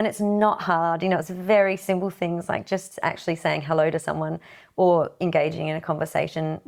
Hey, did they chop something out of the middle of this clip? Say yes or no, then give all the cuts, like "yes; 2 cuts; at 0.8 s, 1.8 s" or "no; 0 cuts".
no; 0 cuts